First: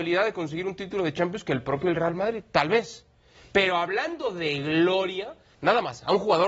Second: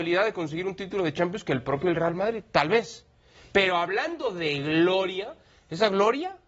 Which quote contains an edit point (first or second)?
first